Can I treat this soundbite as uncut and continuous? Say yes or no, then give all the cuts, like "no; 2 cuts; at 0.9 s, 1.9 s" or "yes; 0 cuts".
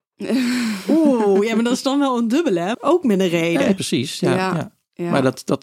no; 1 cut; at 2.7 s